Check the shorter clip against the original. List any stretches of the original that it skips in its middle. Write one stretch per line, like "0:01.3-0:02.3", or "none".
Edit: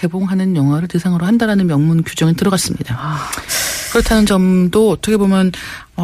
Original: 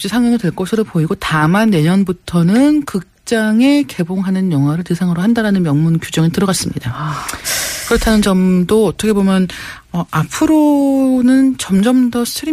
none